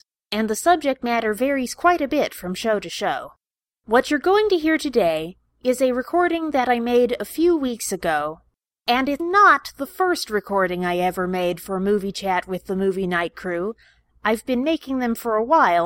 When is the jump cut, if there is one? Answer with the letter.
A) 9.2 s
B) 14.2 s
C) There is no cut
A